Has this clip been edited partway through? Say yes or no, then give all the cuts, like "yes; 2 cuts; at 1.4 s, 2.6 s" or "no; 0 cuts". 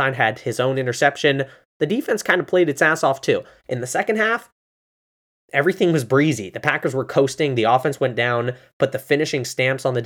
no; 0 cuts